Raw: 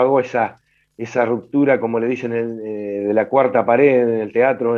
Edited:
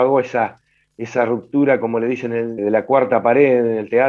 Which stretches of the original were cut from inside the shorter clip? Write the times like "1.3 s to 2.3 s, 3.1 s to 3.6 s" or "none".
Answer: 2.6 s to 3.0 s